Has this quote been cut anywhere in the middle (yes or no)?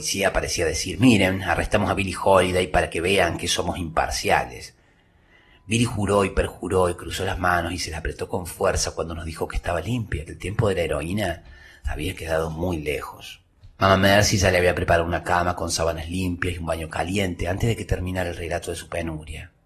yes